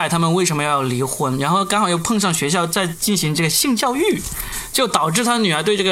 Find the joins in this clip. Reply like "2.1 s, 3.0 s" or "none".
none